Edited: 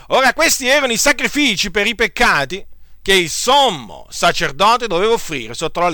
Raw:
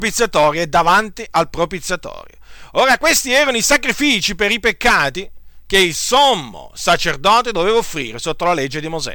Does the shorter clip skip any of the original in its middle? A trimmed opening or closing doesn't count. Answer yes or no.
no